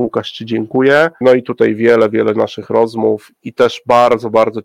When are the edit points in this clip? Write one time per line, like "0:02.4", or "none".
0:01.2